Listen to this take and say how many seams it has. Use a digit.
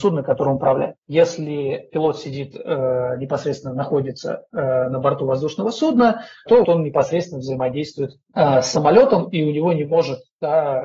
2